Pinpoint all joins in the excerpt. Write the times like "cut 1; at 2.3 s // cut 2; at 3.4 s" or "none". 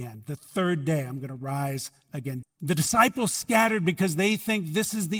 cut 1; at 2.4 s